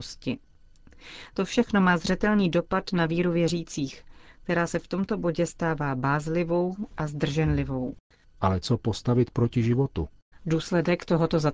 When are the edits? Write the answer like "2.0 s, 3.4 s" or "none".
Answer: 8.2 s, 10.3 s